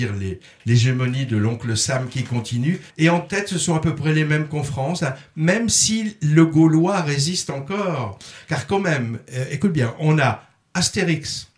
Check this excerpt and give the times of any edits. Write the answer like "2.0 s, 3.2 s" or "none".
2.9 s